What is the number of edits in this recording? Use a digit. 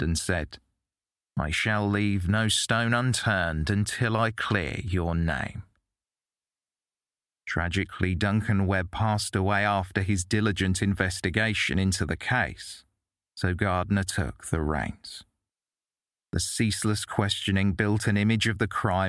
1